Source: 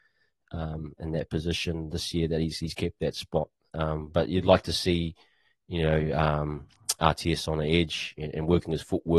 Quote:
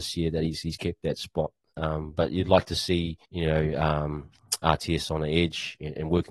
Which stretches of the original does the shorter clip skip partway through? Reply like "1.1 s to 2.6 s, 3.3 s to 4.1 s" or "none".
5.2 s to 5.6 s